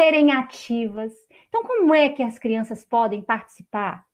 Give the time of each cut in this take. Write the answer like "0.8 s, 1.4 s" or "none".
none